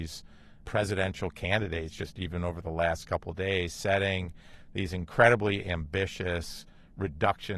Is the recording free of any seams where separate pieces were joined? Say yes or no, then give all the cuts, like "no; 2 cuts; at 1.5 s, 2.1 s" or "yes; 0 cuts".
yes; 0 cuts